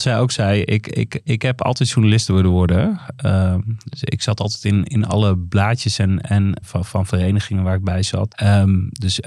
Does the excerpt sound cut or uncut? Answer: cut